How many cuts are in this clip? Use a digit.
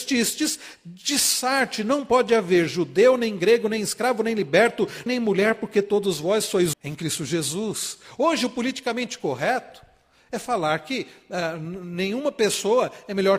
2